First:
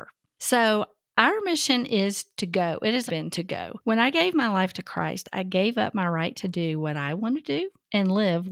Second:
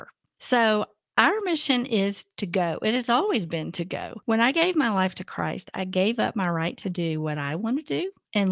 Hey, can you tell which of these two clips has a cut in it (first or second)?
first